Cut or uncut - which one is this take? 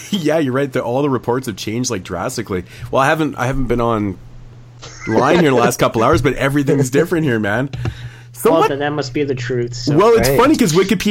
cut